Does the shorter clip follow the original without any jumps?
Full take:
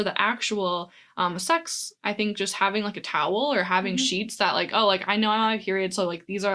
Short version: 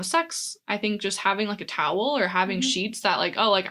yes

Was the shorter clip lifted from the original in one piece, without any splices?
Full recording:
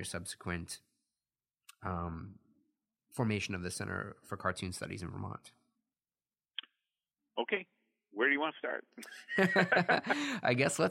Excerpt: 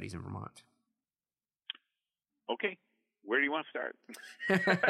yes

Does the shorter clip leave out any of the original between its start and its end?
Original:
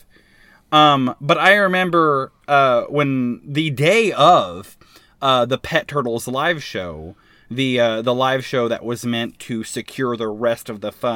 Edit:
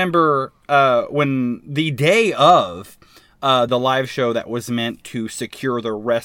yes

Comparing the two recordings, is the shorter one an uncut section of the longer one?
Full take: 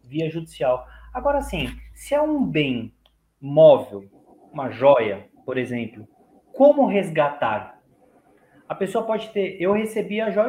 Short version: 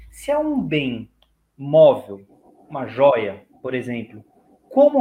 yes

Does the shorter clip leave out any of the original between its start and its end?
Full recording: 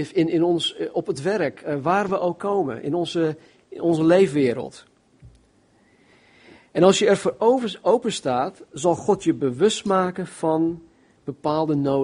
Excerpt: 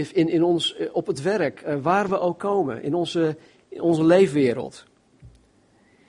no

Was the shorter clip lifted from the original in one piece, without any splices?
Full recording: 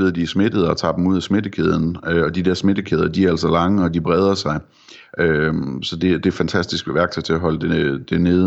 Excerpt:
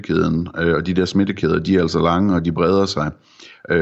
yes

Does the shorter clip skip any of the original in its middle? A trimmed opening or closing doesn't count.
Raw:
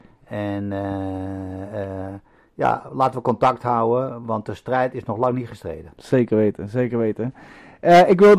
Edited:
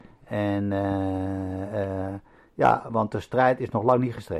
yes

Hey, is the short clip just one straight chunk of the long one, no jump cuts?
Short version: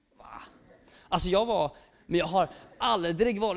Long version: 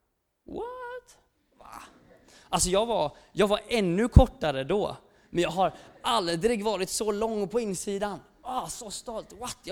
no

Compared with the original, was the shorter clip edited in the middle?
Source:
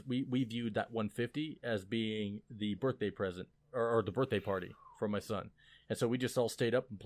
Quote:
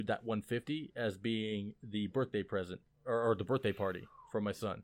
no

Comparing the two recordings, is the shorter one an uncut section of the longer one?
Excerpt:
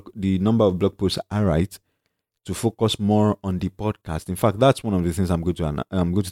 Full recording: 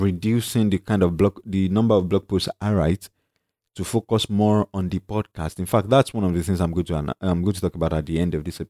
yes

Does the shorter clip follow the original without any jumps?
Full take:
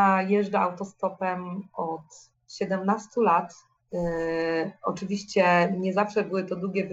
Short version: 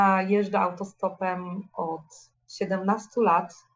yes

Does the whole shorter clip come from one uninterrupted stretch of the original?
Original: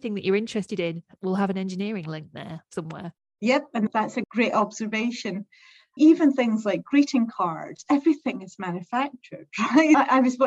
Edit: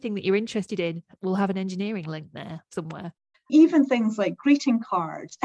no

